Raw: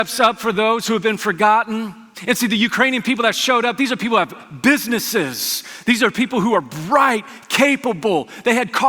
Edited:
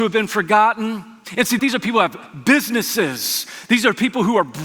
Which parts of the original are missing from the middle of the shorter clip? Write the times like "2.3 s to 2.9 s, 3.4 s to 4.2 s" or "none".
2.5 s to 3.8 s